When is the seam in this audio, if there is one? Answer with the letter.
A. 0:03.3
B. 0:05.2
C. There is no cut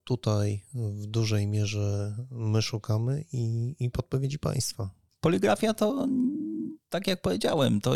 C